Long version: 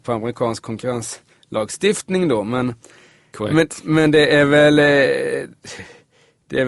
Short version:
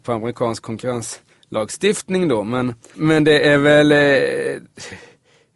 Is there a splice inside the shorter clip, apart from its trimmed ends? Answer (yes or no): yes